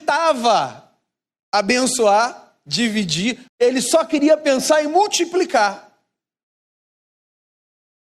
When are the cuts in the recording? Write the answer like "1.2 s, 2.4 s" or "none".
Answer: 3.5 s